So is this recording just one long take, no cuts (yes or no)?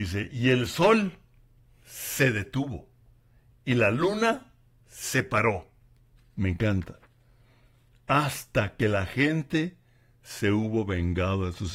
yes